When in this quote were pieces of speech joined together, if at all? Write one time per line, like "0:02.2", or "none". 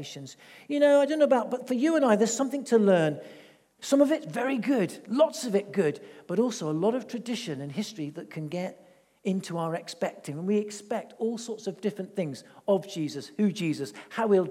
0:03.8